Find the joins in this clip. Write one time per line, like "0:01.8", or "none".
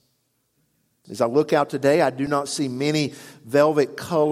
0:01.0

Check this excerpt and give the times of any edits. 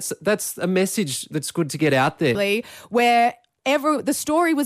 0:02.3

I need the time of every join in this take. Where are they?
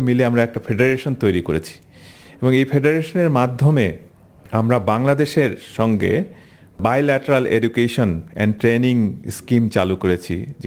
none

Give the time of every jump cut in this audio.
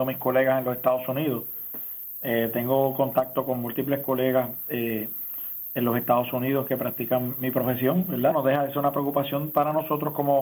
0:08.3

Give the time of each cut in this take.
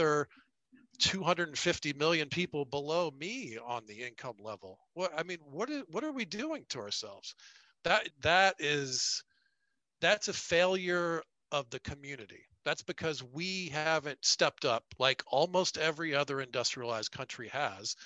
0:08.1

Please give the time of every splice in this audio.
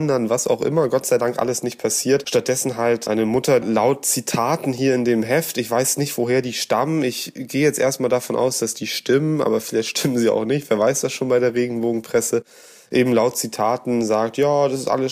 0:03.6

